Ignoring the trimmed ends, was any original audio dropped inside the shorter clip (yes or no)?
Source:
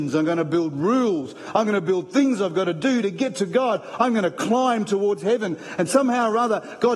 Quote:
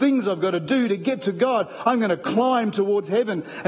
no